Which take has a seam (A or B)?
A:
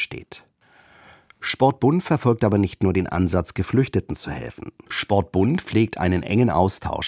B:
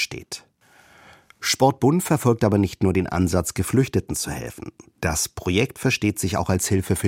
A